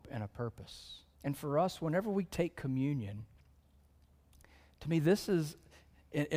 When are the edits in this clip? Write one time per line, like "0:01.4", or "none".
0:01.1